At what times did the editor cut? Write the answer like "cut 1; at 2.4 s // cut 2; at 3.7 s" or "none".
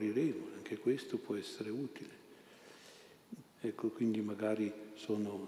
cut 1; at 3.4 s